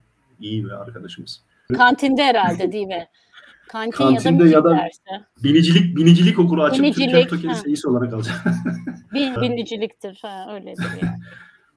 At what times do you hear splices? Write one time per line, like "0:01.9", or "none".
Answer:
0:01.7
0:09.4